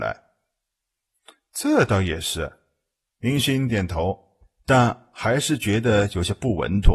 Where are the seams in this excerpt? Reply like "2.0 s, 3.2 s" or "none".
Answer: 3.7 s